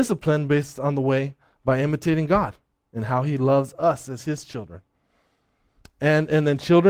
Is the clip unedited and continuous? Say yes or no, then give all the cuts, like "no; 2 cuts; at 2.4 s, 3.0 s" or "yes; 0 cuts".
yes; 0 cuts